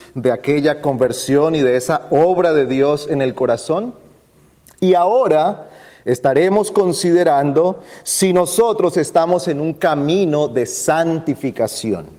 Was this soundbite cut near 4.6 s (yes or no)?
no